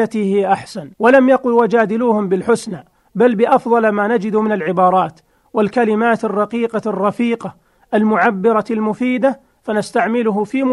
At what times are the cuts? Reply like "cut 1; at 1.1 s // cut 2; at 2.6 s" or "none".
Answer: cut 1; at 0.9 s